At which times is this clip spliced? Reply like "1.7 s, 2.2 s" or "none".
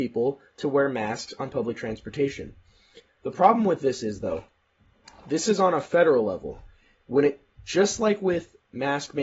none